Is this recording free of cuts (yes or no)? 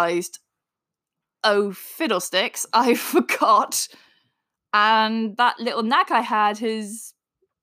yes